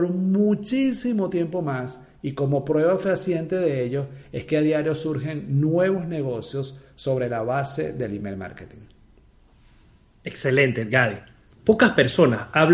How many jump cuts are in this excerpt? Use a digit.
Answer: 1